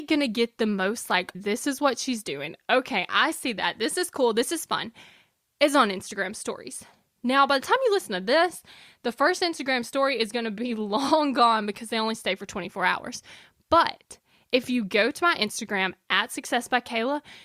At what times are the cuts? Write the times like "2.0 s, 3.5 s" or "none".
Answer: 1.3 s